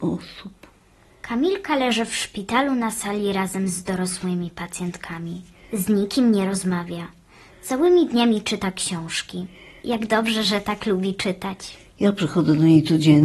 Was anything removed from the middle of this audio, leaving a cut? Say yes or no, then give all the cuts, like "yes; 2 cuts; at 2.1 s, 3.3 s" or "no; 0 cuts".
no; 0 cuts